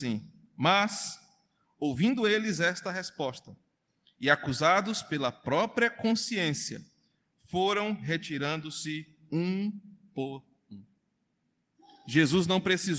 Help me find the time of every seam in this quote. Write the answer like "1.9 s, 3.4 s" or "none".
none